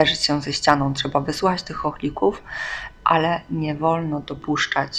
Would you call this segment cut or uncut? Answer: uncut